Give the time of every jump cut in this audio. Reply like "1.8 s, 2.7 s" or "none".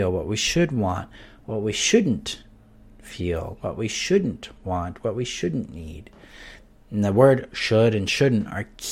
none